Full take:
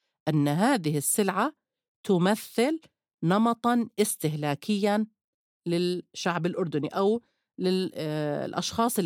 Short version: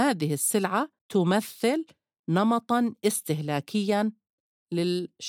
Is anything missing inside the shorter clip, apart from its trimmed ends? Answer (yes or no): yes